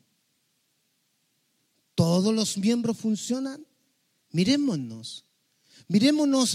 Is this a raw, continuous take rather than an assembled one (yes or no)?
yes